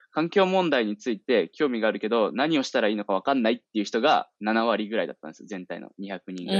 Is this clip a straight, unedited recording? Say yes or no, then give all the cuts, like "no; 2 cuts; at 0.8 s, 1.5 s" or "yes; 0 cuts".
yes; 0 cuts